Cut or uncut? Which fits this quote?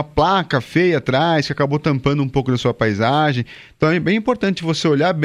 uncut